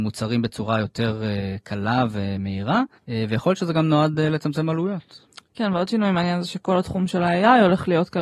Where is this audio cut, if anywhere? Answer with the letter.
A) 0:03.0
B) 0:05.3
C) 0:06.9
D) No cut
A